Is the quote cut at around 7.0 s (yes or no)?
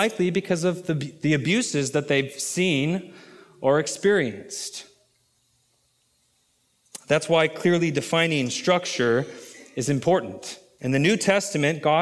no